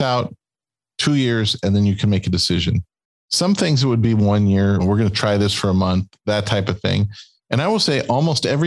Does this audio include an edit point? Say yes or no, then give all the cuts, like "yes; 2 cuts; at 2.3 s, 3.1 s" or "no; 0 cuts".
yes; 2 cuts; at 4.8 s, 7.4 s